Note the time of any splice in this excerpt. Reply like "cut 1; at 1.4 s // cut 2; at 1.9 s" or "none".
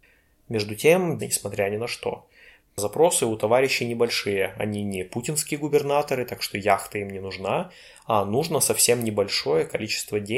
cut 1; at 1.2 s // cut 2; at 2.6 s